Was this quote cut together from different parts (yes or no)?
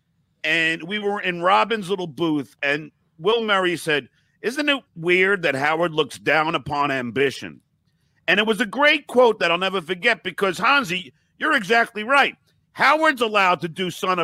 no